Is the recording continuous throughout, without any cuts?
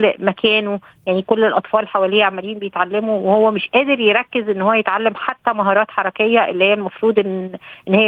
yes; 0 cuts

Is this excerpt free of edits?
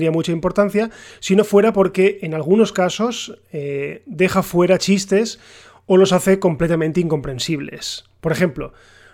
yes; 0 cuts

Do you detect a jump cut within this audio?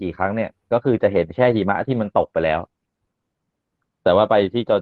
no; 0 cuts

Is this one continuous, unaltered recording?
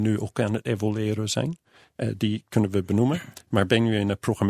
yes; 0 cuts

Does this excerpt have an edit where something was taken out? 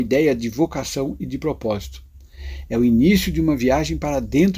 no; 0 cuts

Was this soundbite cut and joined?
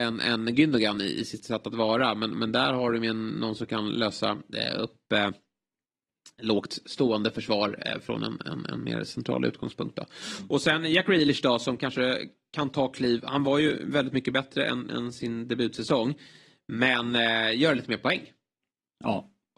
no; 0 cuts

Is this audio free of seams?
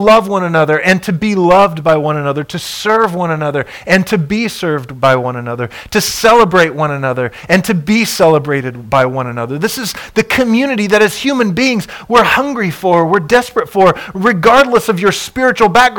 yes; 0 cuts

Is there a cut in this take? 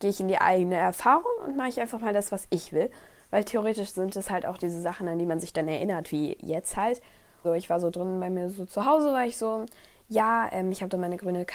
yes; 1 cut; at 7.4 s

